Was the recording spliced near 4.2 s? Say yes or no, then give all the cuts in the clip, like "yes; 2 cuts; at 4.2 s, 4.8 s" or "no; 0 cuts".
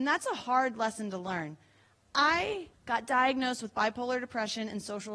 no; 1 cut; at 2.7 s